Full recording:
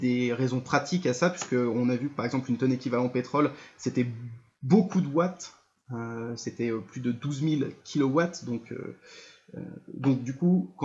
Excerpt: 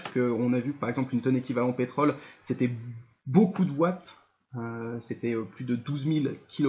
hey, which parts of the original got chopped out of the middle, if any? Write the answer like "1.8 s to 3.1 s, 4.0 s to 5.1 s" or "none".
none